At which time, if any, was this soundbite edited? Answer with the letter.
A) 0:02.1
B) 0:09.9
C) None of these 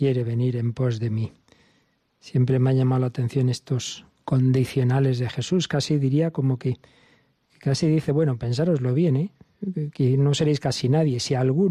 C